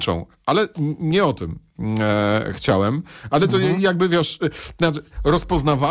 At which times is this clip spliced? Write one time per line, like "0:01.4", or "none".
none

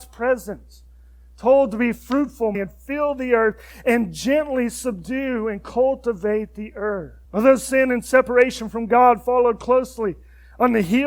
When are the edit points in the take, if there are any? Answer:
0:02.5
0:07.2

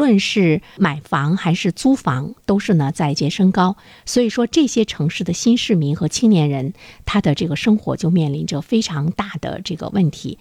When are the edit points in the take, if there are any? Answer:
0:03.2

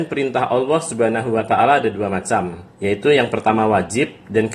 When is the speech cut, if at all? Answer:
0:02.7

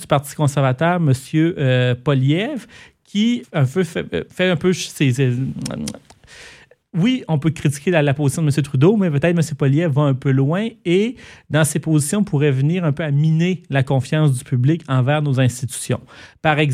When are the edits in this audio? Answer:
0:03.4

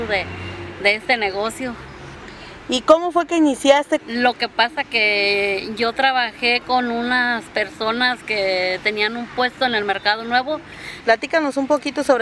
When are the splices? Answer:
0:04.0
0:11.0

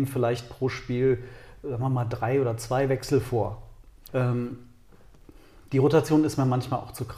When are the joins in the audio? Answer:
0:04.1

